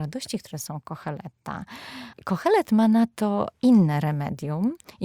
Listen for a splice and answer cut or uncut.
cut